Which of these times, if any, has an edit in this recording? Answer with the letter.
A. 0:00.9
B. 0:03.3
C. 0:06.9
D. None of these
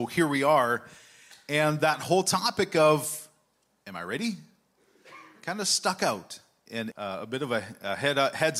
C